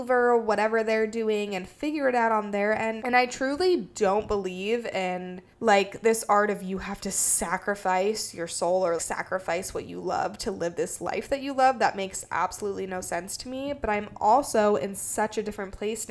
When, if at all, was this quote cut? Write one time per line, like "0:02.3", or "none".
0:03.0
0:05.5
0:09.0

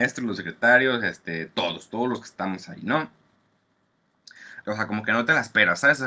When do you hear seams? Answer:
0:04.6

